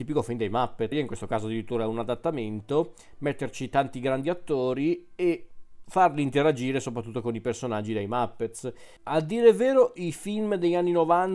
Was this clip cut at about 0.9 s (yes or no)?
yes